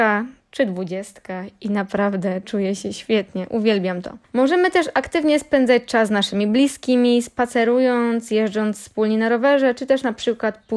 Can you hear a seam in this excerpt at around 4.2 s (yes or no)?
yes